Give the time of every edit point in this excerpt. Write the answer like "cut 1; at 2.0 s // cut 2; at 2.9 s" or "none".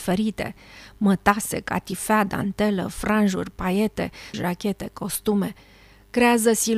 cut 1; at 4.3 s